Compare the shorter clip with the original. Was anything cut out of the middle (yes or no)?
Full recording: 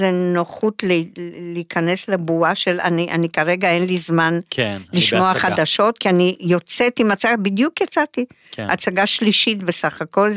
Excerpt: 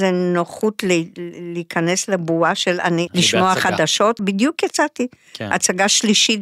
yes